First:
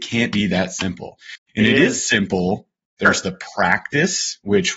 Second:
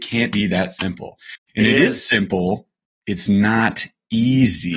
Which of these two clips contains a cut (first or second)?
first